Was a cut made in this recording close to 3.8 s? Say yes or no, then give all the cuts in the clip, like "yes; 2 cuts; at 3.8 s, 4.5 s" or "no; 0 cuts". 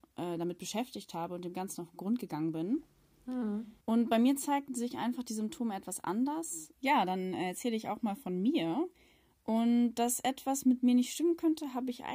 yes; 2 cuts; at 3.8 s, 6.7 s